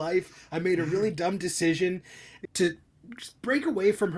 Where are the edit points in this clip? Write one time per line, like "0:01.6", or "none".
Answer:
0:02.4